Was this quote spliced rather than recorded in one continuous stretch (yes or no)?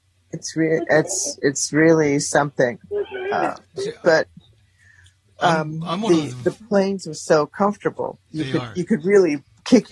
no